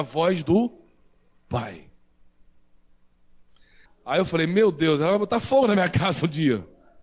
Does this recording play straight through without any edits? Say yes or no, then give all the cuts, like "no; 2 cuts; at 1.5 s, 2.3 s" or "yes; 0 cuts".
no; 1 cut; at 3.9 s